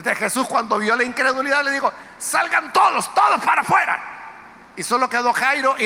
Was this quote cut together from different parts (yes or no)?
no